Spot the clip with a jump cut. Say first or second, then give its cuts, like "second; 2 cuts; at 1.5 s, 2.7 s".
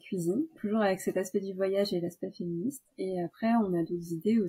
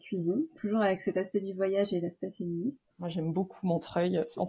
second; 1 cut; at 2.9 s